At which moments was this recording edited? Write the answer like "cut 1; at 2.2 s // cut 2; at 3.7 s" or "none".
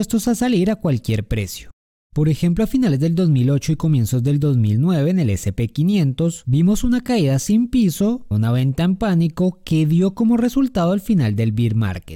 cut 1; at 8.3 s

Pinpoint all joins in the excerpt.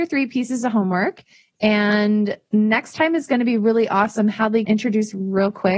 cut 1; at 4.7 s

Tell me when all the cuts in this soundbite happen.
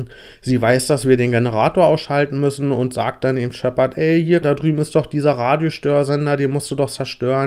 cut 1; at 4.4 s

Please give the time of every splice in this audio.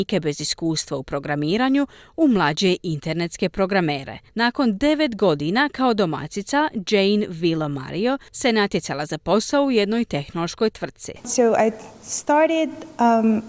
cut 1; at 4.3 s

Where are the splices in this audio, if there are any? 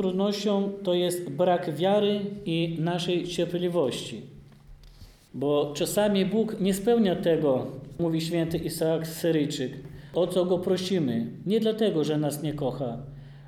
cut 1; at 11.4 s

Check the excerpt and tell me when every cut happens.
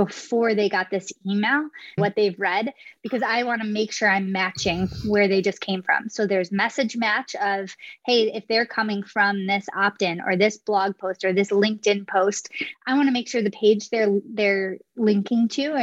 cut 1; at 2.0 s

